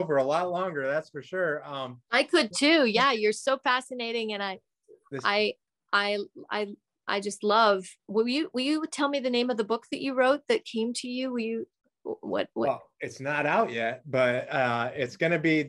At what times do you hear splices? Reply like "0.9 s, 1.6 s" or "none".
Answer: none